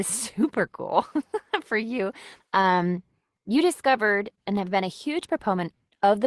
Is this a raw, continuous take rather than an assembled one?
no; 1 cut; at 2.4 s

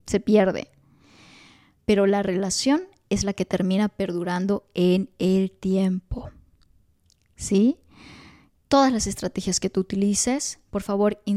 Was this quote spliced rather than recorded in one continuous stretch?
yes; 1 cut; at 8.6 s

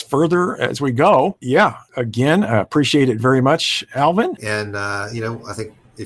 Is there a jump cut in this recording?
yes; 1 cut; at 4.4 s

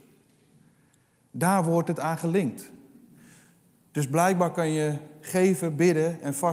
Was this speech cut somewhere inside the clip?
no; 0 cuts

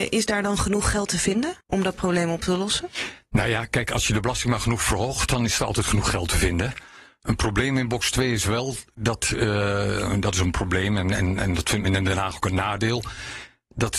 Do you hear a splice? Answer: yes; 1 cut; at 1.6 s

